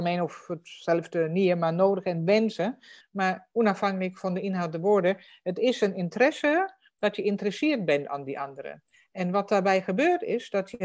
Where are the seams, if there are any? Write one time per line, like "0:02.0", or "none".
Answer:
0:03.0

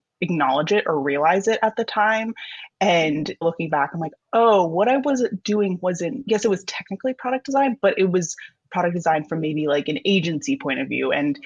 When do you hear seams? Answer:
0:03.4

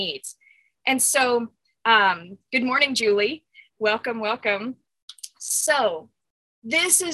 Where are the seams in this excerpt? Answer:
none

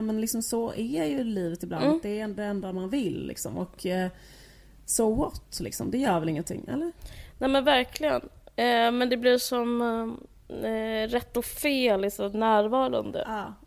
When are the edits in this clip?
none

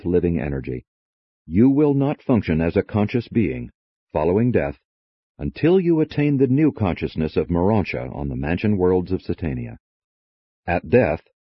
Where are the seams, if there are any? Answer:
0:01.3

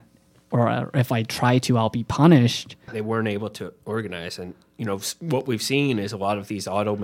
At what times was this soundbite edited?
0:02.9

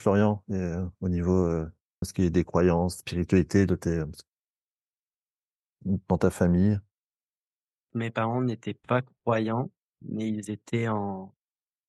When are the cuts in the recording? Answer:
0:02.0

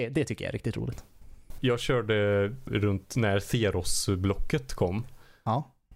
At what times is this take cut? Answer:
0:01.6
0:02.7

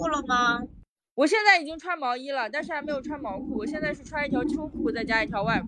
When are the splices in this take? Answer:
none

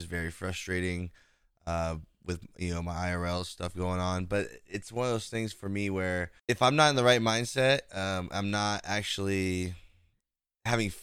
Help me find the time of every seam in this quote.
0:06.4

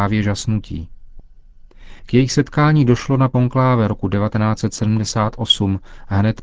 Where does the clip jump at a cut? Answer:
0:02.0

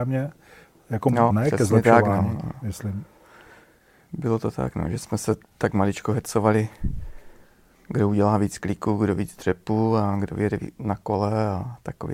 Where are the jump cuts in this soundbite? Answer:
0:01.3
0:10.8

